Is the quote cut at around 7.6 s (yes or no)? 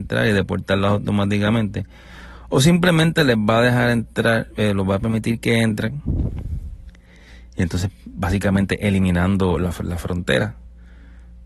no